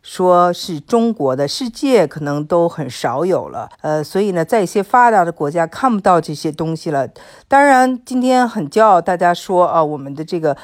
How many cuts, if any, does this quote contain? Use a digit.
1